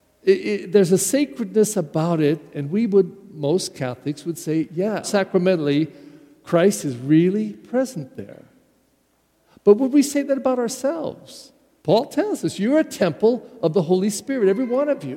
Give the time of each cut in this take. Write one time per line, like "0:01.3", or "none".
0:05.0